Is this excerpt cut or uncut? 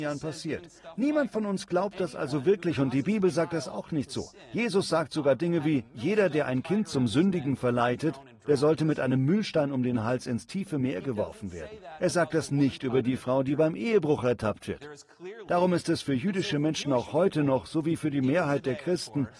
uncut